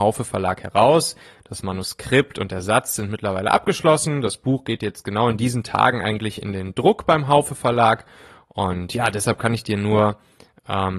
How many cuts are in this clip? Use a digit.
0